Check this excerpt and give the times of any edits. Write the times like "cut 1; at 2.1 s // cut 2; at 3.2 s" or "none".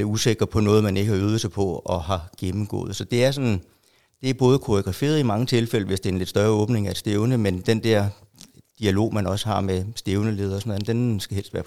none